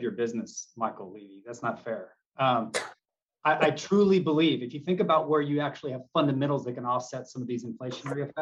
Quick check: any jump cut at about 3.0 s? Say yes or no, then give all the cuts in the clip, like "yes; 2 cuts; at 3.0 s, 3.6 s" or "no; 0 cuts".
no; 0 cuts